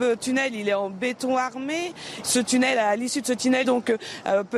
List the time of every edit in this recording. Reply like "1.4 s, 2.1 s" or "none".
2.2 s, 3.6 s